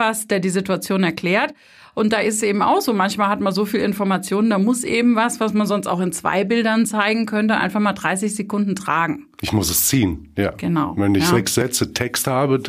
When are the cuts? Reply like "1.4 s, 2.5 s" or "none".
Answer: none